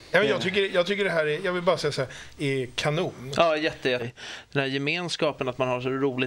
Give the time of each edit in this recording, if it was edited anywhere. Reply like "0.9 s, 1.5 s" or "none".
2.4 s, 4.0 s